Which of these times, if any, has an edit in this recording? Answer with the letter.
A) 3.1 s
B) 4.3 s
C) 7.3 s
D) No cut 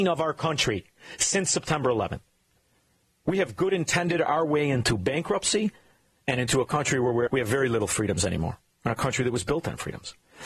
C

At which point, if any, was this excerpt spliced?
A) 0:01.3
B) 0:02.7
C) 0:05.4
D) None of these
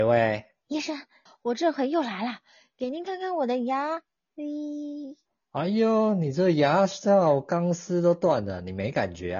A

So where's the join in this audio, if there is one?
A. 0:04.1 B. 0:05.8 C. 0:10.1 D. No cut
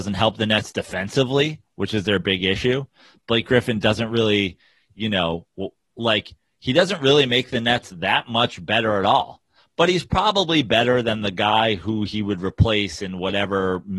D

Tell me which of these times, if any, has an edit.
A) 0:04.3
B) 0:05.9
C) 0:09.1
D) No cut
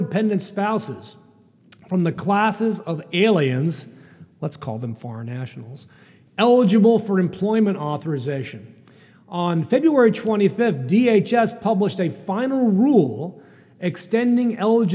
D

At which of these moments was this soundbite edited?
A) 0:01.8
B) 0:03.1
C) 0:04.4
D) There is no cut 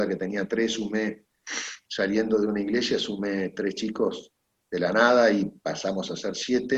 D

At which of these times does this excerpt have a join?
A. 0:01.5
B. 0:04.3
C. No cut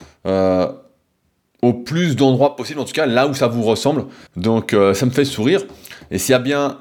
B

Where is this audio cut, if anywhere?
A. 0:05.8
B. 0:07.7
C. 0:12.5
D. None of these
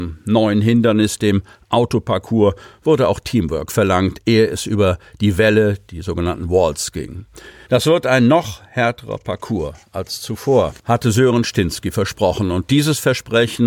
B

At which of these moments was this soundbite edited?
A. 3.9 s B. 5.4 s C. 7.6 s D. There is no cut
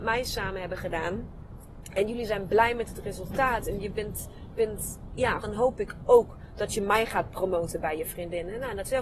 B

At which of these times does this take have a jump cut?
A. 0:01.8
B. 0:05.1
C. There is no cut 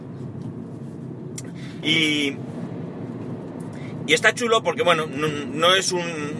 A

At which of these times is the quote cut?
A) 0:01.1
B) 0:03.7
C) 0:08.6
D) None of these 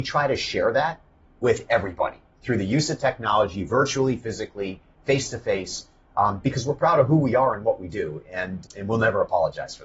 C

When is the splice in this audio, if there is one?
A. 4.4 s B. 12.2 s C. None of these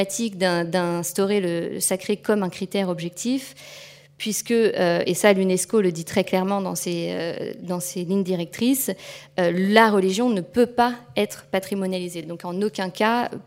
C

